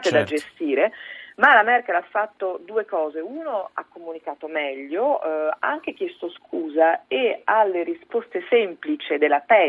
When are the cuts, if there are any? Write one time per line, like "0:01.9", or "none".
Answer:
none